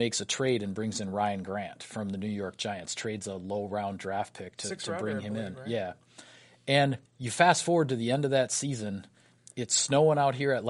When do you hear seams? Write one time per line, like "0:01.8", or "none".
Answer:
0:07.1